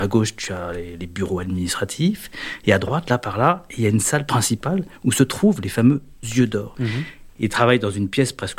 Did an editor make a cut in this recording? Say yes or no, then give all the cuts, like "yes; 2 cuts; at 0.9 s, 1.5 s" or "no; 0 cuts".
yes; 1 cut; at 6.7 s